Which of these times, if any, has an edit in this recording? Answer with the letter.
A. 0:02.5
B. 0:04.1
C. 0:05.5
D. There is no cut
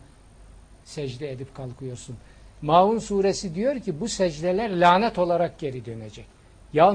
D